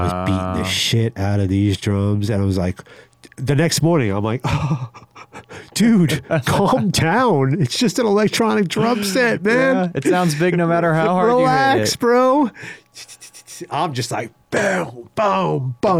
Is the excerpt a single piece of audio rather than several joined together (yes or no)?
yes